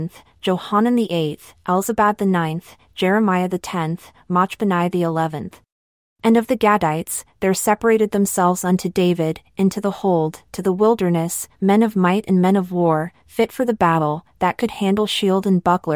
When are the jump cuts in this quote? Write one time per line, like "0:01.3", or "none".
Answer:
0:06.1

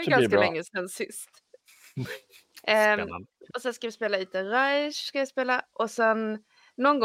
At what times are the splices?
0:03.5

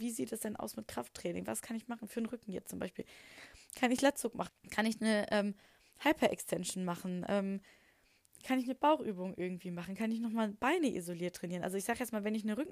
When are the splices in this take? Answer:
0:04.5

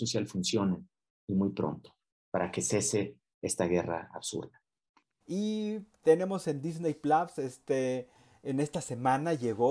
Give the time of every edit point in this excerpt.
0:05.2

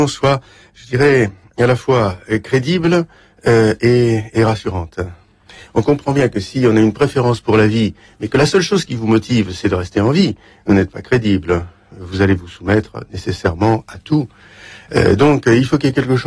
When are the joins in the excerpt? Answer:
0:05.6

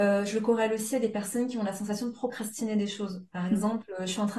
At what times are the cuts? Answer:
none

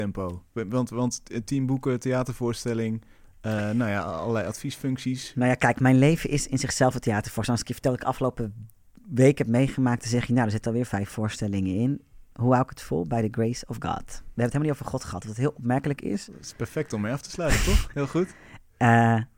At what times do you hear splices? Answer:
0:17.9

